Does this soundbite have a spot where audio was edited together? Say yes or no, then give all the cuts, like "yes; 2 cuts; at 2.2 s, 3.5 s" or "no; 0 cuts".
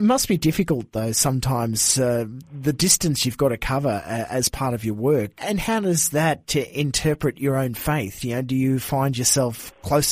yes; 1 cut; at 5.4 s